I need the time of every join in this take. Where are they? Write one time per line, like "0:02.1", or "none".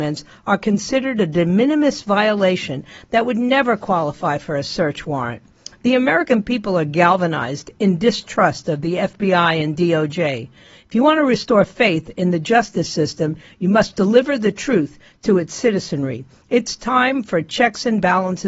none